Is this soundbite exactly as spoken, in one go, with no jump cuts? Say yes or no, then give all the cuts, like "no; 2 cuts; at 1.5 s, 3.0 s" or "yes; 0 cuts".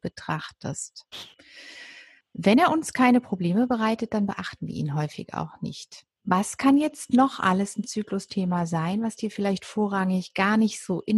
no; 2 cuts; at 2.2 s, 6.1 s